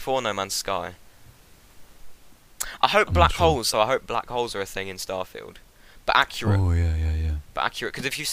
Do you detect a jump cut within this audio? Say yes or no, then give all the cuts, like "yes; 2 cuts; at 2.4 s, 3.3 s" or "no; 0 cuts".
yes; 1 cut; at 3.7 s